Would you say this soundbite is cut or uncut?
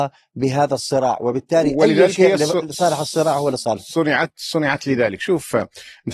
uncut